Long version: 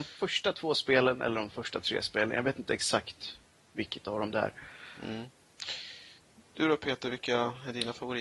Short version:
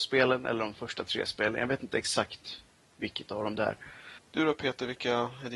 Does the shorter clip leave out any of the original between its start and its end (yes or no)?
yes